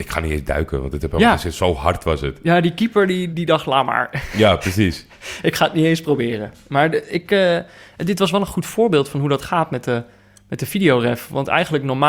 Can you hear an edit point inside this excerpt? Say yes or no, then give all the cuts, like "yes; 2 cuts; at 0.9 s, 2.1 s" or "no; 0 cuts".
yes; 1 cut; at 3.3 s